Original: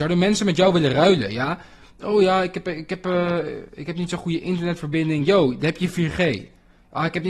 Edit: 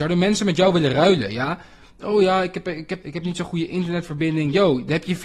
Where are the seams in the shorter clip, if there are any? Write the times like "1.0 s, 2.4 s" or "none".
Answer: 3.0 s